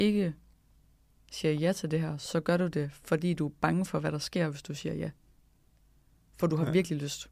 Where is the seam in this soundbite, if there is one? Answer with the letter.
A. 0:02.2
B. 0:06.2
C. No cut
C